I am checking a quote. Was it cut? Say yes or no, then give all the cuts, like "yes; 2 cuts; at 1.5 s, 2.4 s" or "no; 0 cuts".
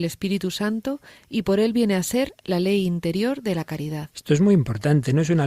no; 0 cuts